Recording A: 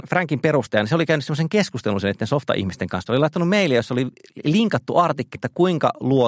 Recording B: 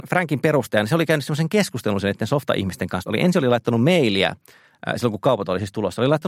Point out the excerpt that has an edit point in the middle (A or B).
A